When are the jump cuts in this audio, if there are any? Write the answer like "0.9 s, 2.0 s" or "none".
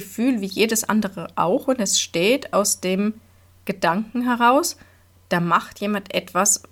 none